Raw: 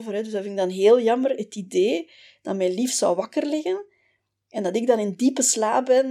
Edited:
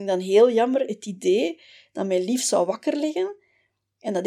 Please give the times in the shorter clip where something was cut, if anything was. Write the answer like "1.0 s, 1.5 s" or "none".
none